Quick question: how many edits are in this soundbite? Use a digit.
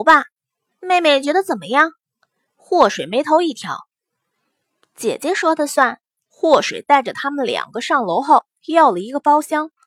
1